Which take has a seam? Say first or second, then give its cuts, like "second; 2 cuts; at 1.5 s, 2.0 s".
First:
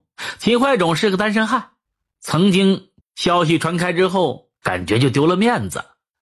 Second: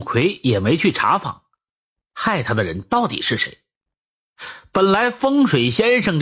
first; 2 cuts; at 3.0 s, 4.6 s